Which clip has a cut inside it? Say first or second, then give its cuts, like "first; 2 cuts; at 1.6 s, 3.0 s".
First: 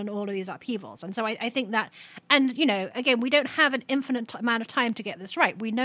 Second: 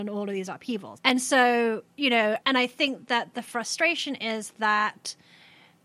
second; 2 cuts; at 1.0 s, 2.4 s